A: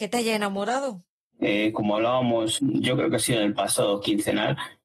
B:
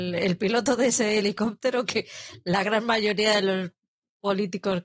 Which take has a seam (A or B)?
A